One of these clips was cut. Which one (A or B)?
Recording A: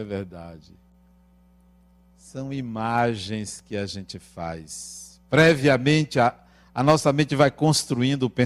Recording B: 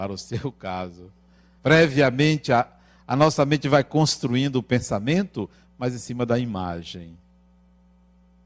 B